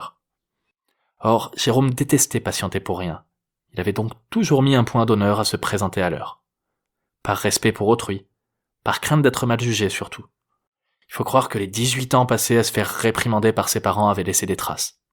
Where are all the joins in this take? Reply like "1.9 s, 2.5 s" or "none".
none